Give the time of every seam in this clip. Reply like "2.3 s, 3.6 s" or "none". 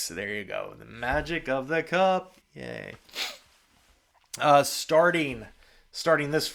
2.4 s